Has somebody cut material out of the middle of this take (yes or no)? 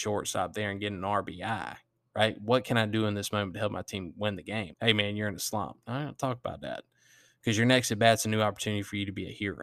yes